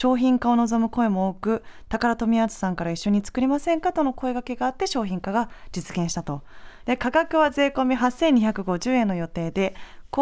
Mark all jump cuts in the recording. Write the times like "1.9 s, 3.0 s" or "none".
6.8 s